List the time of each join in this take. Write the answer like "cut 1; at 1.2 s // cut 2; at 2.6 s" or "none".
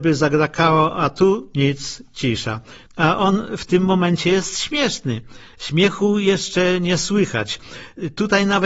cut 1; at 2.9 s // cut 2; at 5.5 s